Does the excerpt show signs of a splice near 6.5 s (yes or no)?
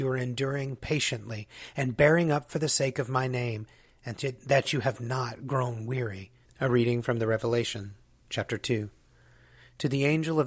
yes